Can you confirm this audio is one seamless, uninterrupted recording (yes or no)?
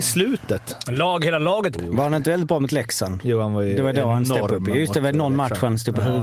no